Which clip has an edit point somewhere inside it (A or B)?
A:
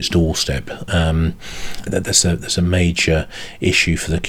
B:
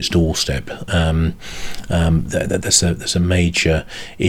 A